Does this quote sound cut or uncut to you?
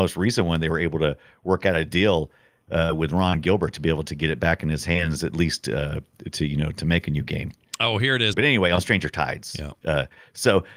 cut